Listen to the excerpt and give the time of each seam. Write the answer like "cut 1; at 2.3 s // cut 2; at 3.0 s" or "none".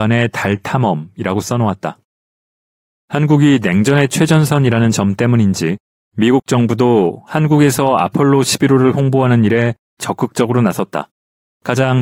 cut 1; at 2.9 s